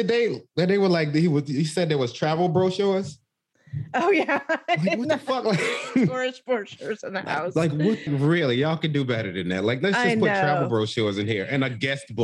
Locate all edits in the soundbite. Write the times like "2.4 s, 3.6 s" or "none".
8.1 s